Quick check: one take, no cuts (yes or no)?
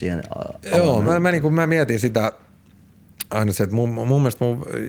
no